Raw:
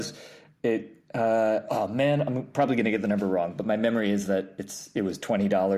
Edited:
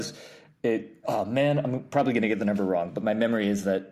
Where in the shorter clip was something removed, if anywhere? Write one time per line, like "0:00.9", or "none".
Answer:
0:01.0

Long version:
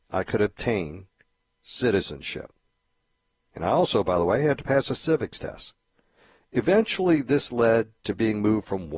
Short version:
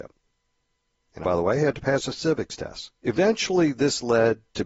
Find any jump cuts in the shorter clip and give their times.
0:01.2
0:03.0

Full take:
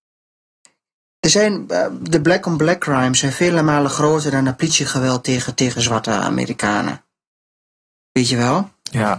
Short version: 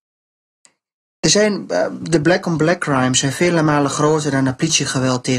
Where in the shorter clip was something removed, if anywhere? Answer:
none

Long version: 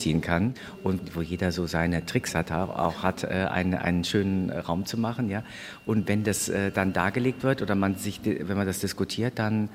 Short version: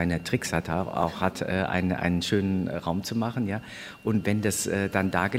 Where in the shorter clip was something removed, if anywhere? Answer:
none

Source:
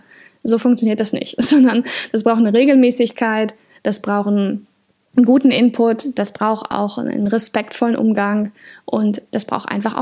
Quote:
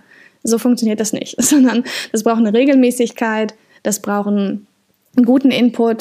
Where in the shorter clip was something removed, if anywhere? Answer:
none

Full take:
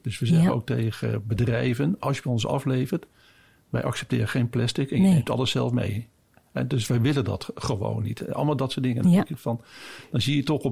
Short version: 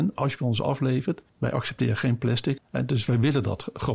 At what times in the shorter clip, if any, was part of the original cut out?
0:01.3
0:02.6

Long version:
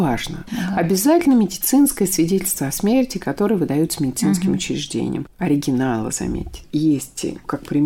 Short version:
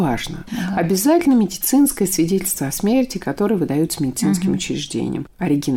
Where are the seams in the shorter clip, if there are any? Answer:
none

